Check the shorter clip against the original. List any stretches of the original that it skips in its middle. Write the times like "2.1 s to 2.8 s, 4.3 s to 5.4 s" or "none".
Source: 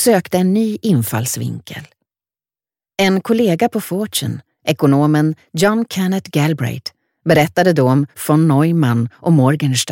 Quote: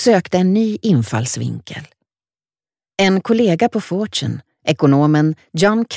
none